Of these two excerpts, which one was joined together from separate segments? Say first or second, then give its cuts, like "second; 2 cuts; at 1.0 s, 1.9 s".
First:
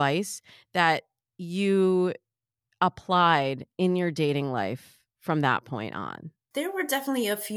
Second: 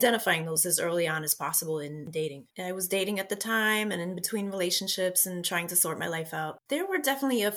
second; 2 cuts; at 2.5 s, 6.6 s